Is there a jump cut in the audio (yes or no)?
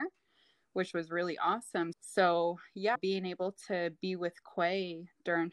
yes